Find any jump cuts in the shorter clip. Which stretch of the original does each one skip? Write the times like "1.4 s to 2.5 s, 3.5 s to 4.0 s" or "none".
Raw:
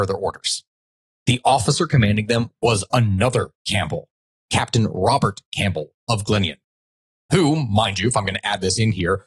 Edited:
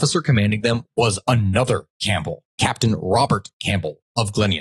4.1 s to 4.4 s